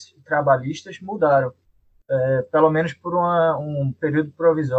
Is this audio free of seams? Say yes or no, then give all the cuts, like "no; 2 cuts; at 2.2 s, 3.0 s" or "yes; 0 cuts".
yes; 0 cuts